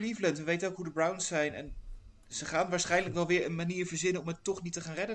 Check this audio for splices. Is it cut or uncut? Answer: uncut